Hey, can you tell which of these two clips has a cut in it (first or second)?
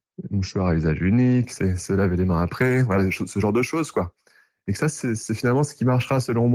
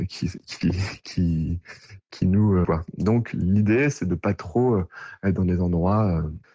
second